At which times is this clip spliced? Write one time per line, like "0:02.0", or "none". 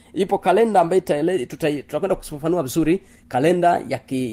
none